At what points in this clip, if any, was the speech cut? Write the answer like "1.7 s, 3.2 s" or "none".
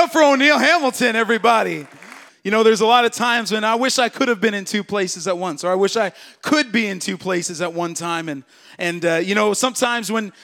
2.3 s